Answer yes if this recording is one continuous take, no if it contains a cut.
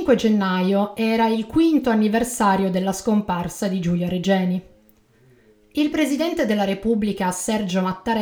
yes